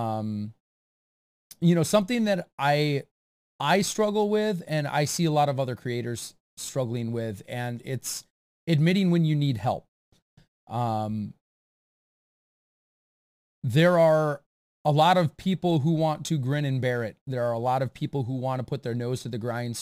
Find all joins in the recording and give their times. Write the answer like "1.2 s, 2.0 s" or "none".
none